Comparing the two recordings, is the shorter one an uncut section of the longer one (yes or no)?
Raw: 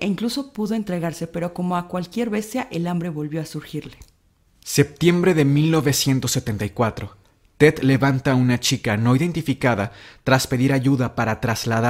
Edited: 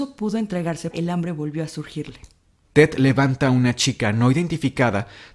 no